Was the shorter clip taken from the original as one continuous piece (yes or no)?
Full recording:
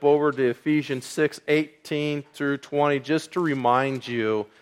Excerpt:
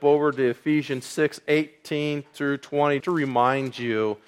no